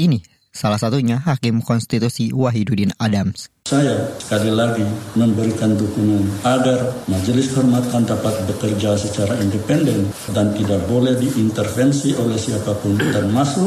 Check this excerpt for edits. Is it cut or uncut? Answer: cut